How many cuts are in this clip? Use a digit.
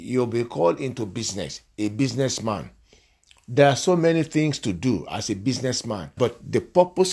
1